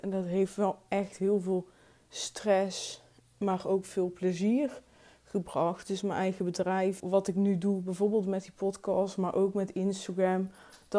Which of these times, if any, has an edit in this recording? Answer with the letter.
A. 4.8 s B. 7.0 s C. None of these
B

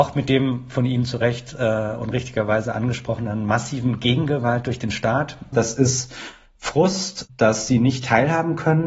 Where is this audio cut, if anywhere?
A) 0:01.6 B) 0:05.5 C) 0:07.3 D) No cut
B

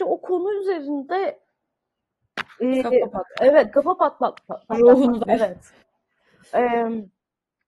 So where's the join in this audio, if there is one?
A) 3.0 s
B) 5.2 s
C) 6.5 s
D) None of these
B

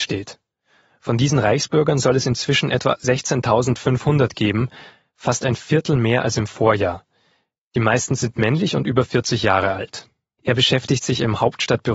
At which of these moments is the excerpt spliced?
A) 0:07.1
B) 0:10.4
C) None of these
B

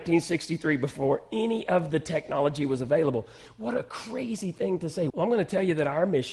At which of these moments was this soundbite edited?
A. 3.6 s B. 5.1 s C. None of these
B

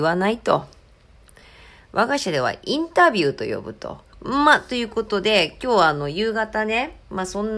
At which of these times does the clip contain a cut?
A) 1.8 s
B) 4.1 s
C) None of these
B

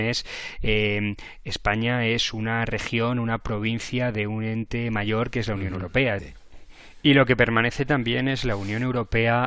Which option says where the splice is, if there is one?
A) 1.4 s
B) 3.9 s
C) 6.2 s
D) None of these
C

